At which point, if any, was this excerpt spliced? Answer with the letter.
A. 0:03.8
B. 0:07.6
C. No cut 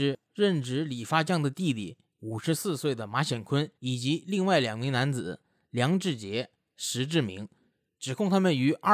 A